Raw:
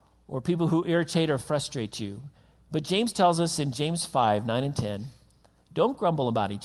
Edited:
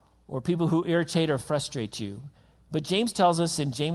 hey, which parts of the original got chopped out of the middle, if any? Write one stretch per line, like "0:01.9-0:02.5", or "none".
none